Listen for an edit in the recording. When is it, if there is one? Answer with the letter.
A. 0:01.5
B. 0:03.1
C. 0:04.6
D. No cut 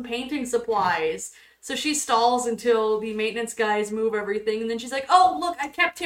D